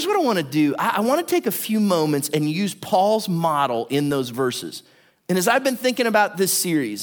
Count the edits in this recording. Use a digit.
1